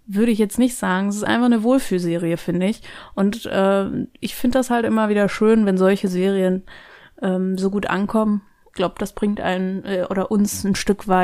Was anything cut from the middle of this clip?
no; 0 cuts

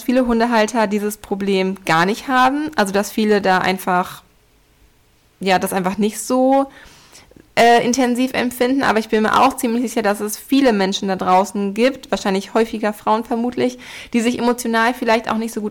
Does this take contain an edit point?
no; 0 cuts

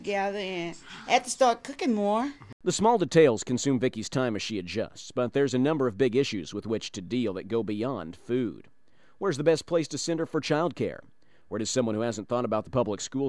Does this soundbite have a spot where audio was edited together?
no; 0 cuts

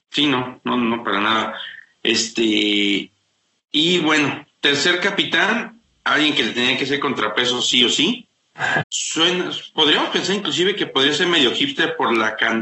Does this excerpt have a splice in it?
yes; 1 cut; at 8.8 s

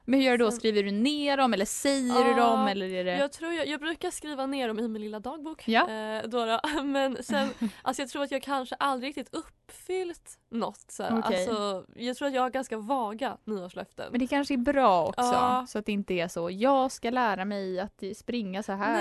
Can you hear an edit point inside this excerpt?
yes; 1 cut; at 10.4 s

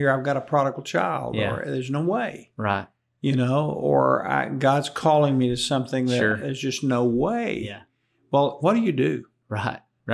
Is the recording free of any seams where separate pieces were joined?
no; 1 cut; at 8.6 s

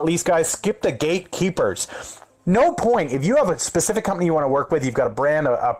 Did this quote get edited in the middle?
no; 0 cuts

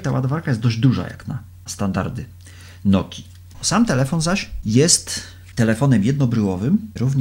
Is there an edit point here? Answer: no; 0 cuts

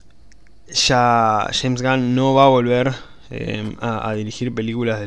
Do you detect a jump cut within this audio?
no; 0 cuts

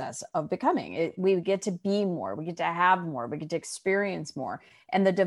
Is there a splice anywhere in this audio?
no; 0 cuts

